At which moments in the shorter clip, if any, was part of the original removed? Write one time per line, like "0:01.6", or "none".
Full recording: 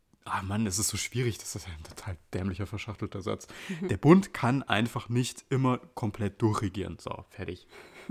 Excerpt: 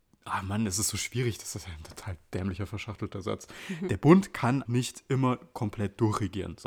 0:04.7